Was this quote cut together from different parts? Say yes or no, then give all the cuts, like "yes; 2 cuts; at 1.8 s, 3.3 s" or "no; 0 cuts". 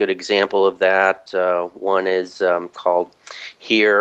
yes; 1 cut; at 1.3 s